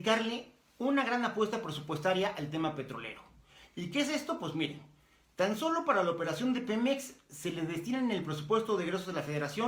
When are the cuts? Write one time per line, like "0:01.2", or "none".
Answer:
none